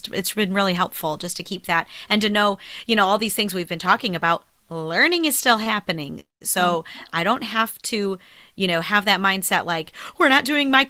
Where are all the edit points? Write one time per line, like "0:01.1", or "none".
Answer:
none

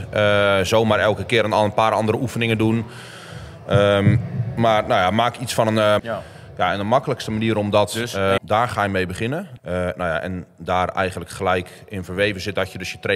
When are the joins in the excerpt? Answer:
0:06.0
0:08.4
0:09.6

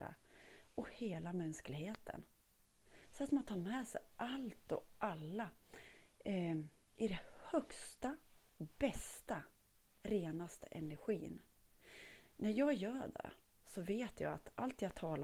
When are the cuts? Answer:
none

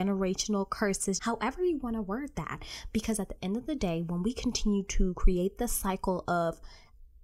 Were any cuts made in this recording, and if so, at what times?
0:01.2

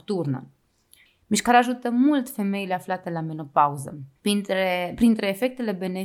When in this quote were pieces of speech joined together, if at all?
0:01.1
0:04.2

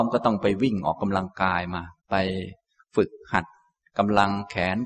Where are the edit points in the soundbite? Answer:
0:02.0

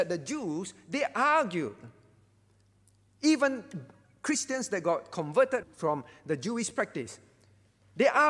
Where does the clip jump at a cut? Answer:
0:05.6

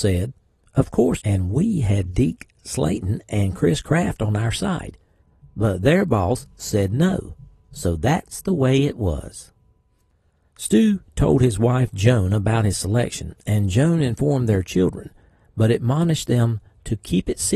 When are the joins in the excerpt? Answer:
0:01.2

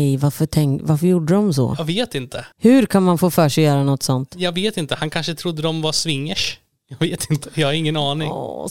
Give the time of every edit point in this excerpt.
0:02.5

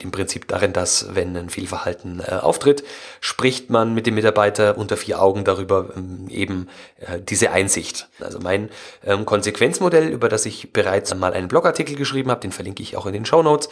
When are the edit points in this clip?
0:08.2
0:11.1

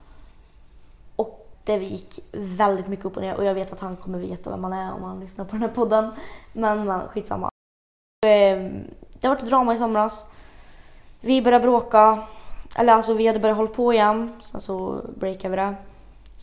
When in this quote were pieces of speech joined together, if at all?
0:01.5

